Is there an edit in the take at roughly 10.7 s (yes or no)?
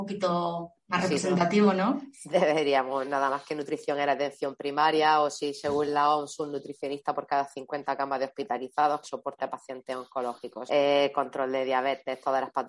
yes